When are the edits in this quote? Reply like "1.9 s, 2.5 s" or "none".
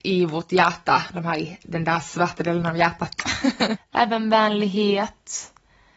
3.8 s